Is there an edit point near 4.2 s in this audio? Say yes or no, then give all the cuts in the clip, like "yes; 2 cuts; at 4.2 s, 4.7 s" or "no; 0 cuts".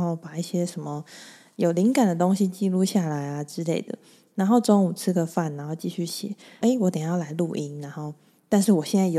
no; 1 cut; at 6.6 s